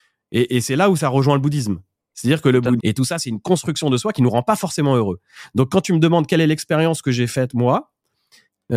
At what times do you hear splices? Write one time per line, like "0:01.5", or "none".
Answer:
0:02.8